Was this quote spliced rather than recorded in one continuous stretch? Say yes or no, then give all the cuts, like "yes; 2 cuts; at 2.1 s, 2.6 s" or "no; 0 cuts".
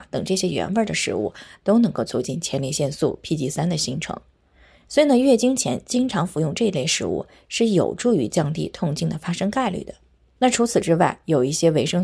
no; 0 cuts